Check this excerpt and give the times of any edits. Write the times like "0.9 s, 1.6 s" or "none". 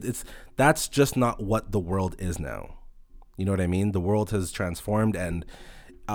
none